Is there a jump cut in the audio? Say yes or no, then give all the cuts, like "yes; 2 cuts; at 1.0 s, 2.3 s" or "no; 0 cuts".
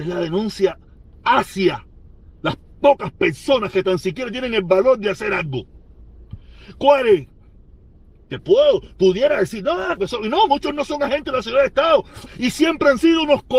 yes; 3 cuts; at 8.4 s, 10.0 s, 12.3 s